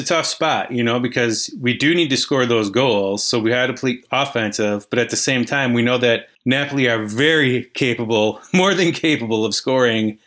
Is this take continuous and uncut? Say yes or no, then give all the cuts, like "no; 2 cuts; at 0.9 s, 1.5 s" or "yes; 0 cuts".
no; 1 cut; at 6.4 s